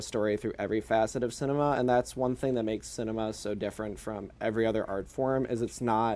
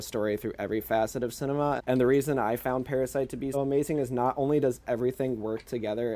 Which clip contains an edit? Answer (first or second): second